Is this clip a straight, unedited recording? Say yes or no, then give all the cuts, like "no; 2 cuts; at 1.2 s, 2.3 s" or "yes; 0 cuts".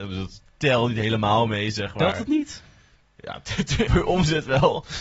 no; 1 cut; at 3.9 s